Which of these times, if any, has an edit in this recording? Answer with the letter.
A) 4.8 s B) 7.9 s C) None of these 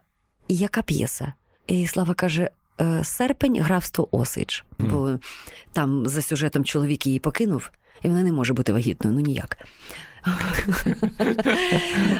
A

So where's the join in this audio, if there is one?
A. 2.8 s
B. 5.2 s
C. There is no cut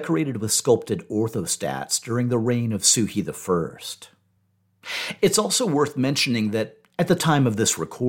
B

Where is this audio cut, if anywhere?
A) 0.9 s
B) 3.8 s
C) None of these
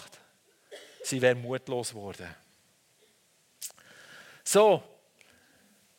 C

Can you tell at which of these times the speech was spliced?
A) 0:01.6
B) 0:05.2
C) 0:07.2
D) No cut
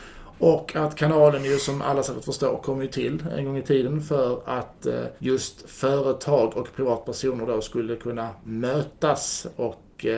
B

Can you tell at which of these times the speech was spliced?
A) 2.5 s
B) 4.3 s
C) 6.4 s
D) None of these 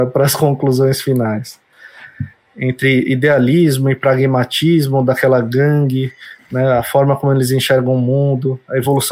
A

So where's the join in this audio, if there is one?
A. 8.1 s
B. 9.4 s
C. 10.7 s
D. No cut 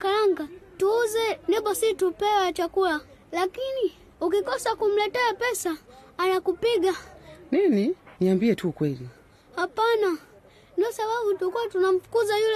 A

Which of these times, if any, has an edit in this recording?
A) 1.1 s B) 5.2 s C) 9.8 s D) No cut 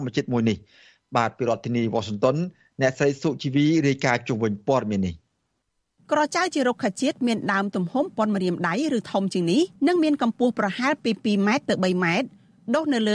C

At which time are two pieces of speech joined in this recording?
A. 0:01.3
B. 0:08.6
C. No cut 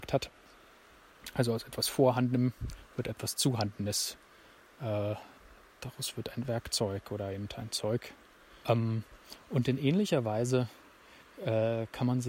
B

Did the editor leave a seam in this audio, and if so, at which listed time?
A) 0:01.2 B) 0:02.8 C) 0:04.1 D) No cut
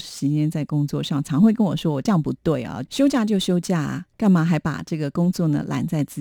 B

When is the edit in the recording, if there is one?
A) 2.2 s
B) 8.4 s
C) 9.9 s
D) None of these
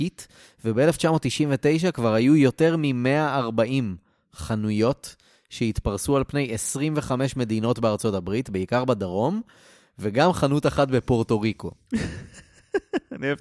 D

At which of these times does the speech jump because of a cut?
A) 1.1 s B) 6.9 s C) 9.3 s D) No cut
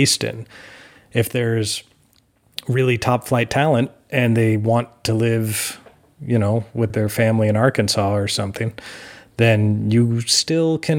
B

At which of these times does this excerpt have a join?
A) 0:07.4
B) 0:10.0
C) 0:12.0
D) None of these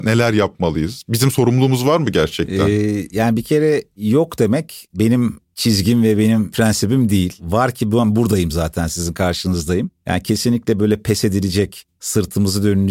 D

